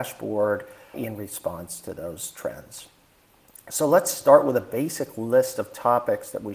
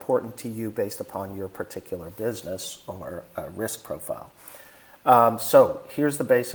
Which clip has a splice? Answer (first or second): first